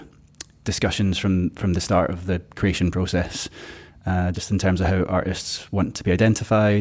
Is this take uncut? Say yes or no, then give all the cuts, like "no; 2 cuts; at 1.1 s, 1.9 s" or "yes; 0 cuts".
yes; 0 cuts